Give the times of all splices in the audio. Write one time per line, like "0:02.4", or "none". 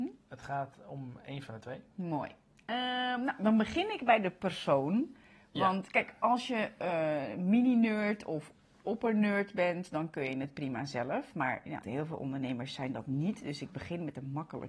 0:11.8